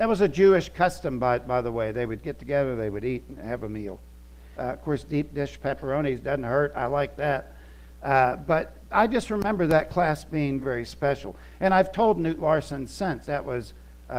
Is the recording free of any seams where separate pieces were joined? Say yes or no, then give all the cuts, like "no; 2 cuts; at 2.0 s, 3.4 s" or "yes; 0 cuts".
no; 3 cuts; at 4.5 s, 10.6 s, 13.2 s